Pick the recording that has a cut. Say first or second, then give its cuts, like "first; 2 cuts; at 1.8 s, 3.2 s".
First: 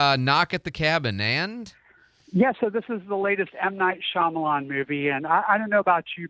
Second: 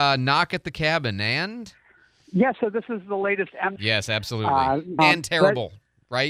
second; 2 cuts; at 3.8 s, 5.0 s